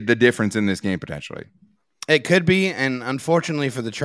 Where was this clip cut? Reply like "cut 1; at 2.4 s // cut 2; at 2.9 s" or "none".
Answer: none